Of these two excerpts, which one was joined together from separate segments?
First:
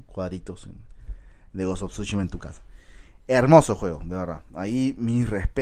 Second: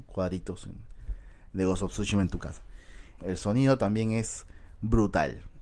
second; 1 cut; at 3.2 s

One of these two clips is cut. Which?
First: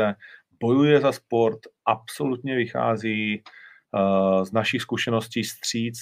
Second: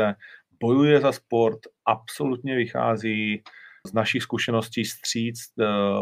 second; 1 cut; at 3.8 s

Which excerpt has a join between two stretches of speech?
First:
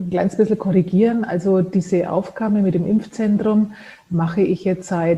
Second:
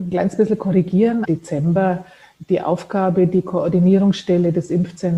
second; 1 cut; at 1.2 s

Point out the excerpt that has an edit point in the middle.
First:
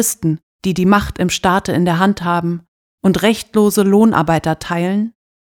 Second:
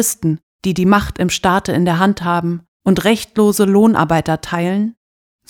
second; 1 cut; at 2.7 s

